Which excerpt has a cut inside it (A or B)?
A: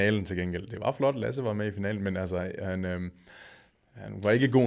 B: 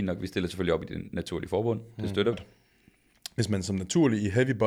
B